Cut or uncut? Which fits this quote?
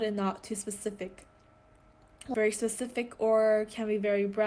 cut